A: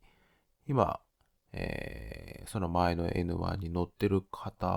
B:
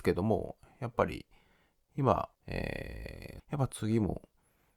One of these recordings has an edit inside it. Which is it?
B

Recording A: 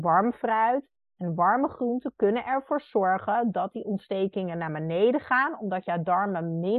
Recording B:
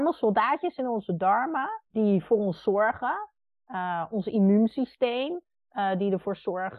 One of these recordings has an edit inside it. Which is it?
B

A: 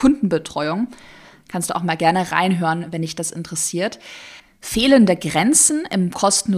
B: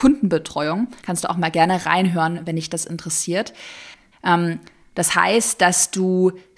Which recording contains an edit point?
B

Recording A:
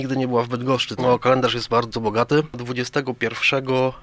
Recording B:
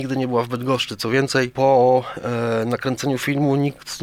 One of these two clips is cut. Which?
A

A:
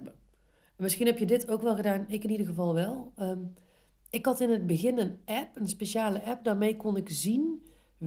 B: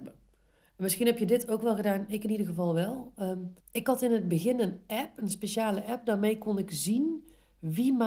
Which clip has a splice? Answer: B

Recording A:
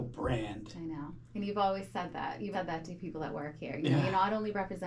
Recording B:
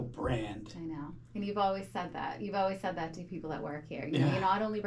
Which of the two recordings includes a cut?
A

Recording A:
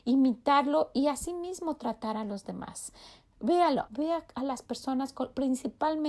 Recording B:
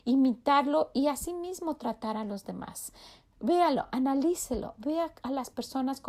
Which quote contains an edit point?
A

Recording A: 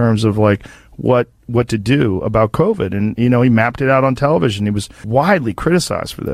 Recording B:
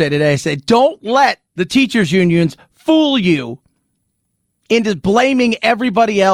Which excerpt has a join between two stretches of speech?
B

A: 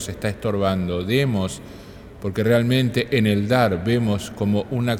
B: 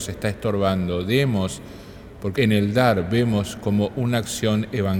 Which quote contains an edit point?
B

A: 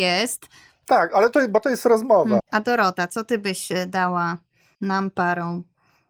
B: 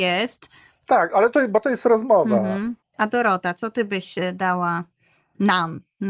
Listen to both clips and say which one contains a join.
A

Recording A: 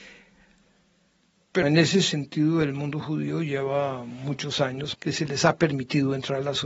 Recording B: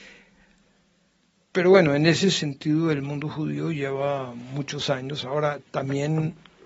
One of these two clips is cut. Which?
A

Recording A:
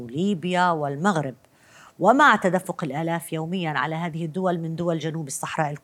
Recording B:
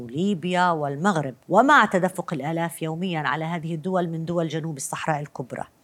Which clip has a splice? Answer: B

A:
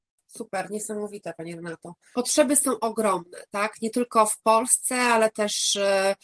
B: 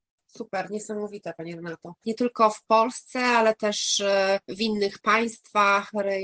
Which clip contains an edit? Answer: B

